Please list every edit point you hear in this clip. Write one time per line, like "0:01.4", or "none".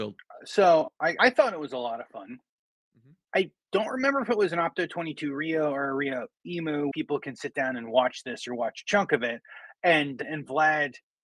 0:01.2
0:03.3
0:06.9